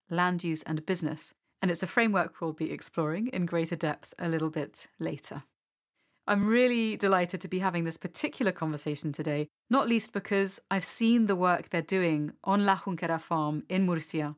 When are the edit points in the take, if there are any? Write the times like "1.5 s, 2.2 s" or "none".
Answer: none